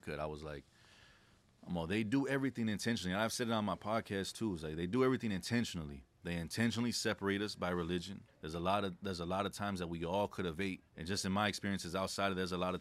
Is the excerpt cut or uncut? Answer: cut